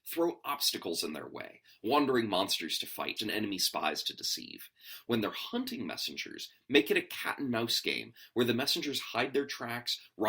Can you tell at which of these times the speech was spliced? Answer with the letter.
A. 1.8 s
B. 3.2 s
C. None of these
B